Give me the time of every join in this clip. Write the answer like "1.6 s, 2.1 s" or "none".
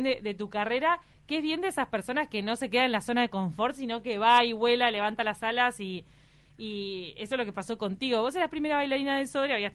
none